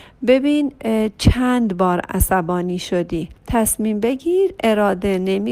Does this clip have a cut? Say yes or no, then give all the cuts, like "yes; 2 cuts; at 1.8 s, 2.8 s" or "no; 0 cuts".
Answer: yes; 1 cut; at 3.4 s